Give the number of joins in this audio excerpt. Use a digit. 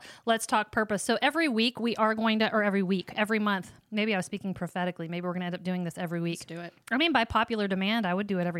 0